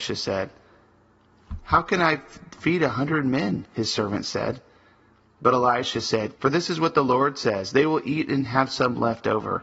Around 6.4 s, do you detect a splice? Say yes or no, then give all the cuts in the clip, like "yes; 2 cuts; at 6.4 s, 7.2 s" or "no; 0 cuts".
yes; 1 cut; at 6.4 s